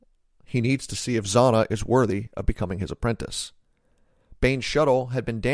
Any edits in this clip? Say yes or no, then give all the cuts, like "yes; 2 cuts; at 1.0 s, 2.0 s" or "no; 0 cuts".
no; 0 cuts